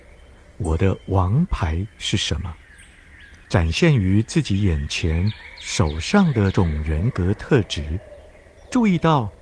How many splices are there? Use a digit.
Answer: 2